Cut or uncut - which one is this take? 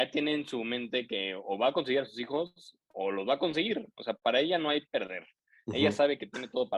uncut